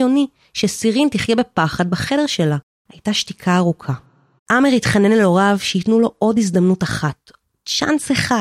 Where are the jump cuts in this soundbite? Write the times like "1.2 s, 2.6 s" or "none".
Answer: 2.7 s, 4.4 s